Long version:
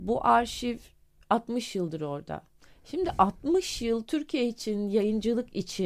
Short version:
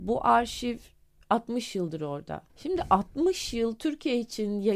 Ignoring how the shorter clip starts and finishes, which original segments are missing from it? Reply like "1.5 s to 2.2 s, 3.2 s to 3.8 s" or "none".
2.5 s to 2.8 s

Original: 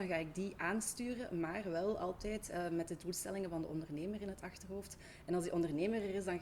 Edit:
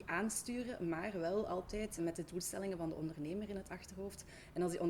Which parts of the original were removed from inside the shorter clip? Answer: 2.5 s to 2.7 s

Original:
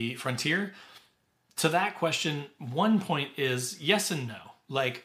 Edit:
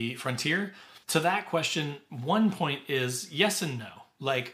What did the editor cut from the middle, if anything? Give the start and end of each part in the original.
1.0 s to 1.5 s

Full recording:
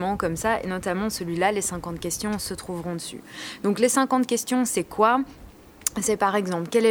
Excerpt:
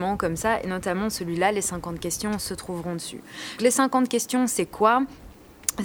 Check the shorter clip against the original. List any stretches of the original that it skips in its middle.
3.6 s to 3.8 s

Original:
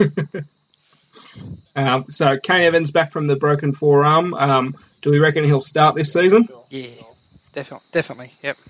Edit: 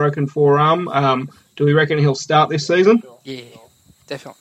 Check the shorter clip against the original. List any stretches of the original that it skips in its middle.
none

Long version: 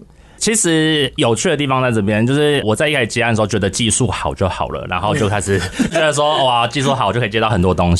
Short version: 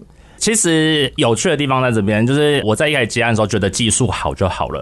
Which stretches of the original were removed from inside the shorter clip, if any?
none

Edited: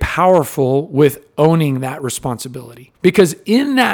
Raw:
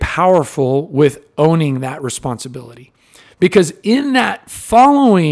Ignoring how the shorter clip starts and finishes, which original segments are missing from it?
3.0 s to 3.3 s

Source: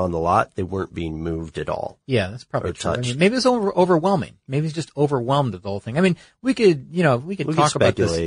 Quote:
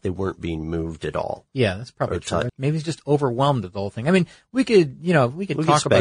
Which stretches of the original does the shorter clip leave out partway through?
3.0 s to 4.4 s

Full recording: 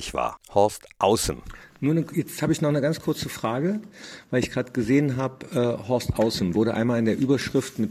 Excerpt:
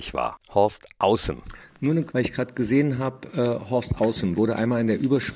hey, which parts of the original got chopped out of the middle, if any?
2.1 s to 4.3 s

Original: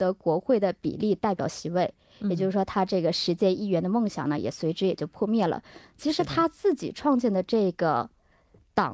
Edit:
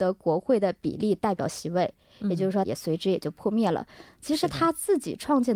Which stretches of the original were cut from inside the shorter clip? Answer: 2.6 s to 4.4 s

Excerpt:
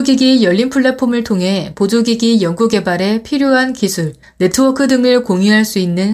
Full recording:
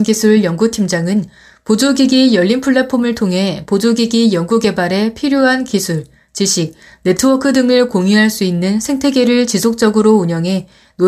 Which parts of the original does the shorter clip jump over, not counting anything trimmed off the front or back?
6.1 s to 6.9 s

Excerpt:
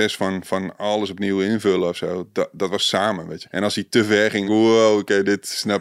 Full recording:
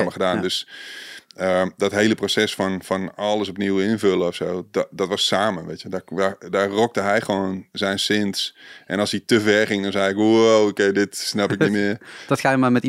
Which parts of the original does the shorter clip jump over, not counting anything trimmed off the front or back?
5.8 s to 8.8 s, 9.8 s to 10.1 s

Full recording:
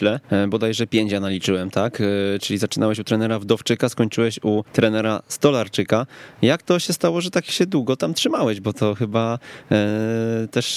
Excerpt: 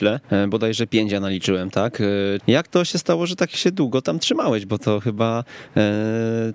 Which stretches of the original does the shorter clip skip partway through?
2.4 s to 6.3 s

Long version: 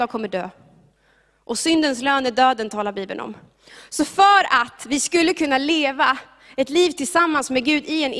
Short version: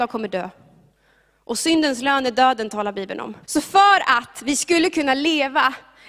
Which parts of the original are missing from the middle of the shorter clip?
3.4 s to 3.9 s

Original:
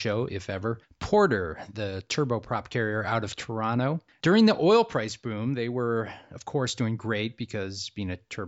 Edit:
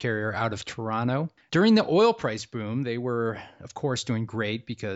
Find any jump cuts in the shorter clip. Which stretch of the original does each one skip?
none

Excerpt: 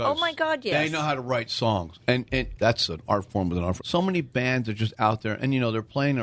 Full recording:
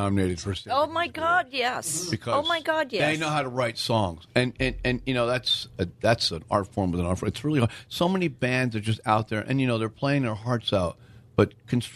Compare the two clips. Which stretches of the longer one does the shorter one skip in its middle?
4.8 s to 6.0 s, 7.2 s to 7.8 s

